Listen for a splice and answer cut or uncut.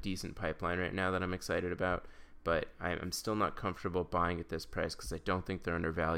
uncut